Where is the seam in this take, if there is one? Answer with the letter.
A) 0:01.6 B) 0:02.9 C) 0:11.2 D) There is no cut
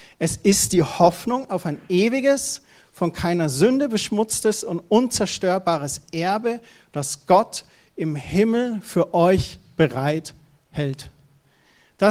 D